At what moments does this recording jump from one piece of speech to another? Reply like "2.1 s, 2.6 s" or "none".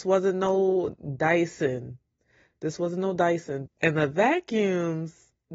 3.7 s